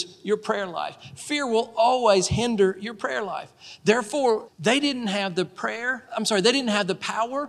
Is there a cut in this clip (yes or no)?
yes